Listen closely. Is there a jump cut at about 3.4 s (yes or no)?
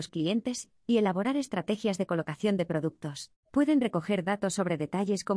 yes